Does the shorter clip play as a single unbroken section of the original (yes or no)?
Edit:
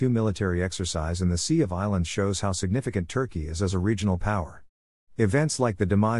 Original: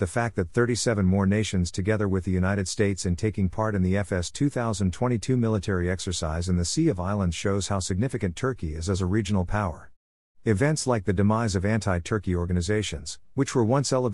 yes